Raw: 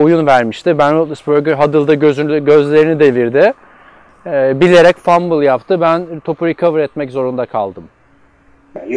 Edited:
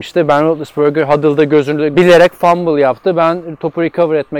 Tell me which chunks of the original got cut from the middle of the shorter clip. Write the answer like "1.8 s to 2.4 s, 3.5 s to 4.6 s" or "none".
2.4 s to 4.6 s